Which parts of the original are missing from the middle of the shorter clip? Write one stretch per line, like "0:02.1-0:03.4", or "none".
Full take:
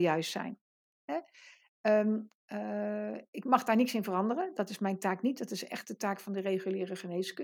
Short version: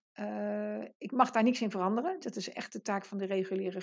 0:04.5-0:05.4